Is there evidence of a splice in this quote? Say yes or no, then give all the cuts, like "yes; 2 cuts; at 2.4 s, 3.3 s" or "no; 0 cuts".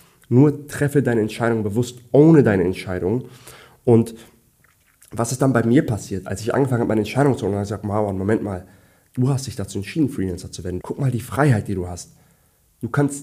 yes; 1 cut; at 10.8 s